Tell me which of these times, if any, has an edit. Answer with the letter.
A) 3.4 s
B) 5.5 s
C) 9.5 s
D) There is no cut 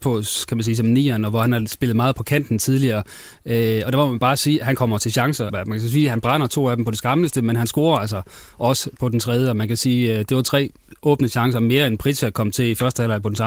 B